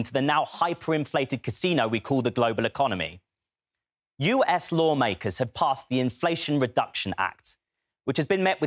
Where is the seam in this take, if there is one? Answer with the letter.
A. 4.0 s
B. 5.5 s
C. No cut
B